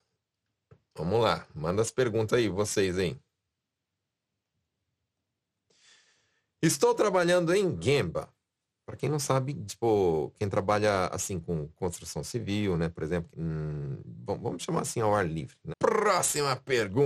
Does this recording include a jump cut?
yes; 3 cuts; at 9.7 s, 13.3 s, 15.7 s

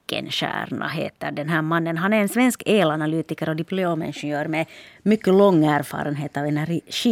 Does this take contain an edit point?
no; 0 cuts

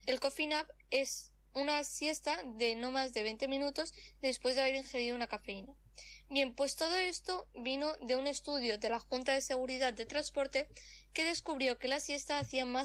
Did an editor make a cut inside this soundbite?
no; 0 cuts

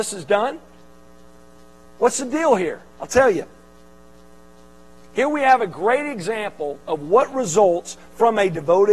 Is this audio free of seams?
no; 2 cuts; at 2.9 s, 6.8 s

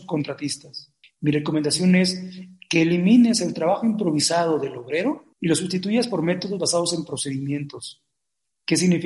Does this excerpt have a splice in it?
yes; 2 cuts; at 1.0 s, 5.3 s

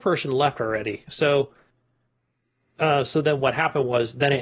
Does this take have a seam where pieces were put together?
no; 0 cuts

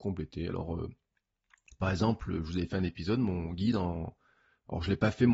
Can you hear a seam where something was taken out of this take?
no; 0 cuts

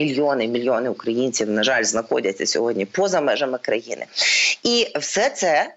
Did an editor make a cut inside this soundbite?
no; 0 cuts

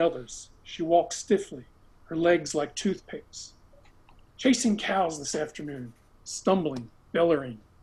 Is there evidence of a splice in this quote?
yes; 2 cuts; at 4.3 s, 6.1 s

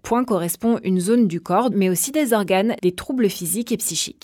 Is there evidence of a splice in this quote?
yes; 2 cuts; at 1.7 s, 2.8 s

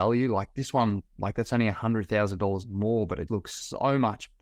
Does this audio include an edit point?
yes; 1 cut; at 3.3 s

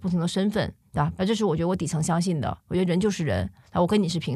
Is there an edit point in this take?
yes; 1 cut; at 1.2 s

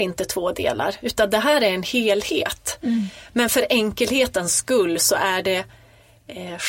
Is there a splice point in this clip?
no; 0 cuts

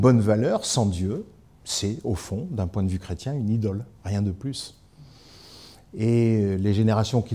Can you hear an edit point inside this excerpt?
no; 0 cuts

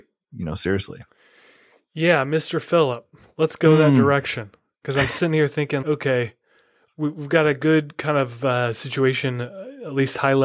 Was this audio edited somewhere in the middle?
yes; 1 cut; at 5.8 s

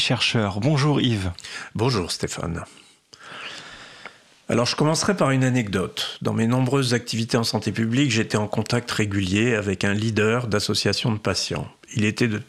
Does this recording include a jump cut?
no; 0 cuts

